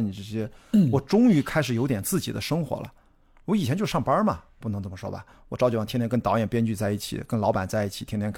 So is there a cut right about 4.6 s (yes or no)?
yes